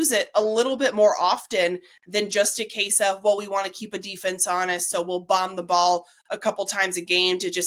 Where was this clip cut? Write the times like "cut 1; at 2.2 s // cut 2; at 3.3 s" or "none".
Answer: none